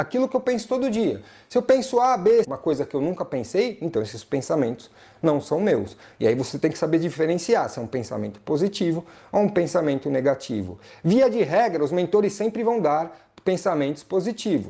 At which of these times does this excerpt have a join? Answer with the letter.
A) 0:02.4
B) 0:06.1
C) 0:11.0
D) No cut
A